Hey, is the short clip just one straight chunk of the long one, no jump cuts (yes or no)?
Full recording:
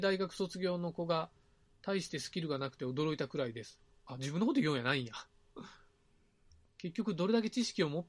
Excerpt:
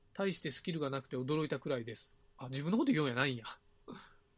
yes